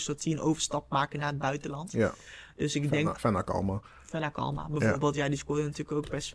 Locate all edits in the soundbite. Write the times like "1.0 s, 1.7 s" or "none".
none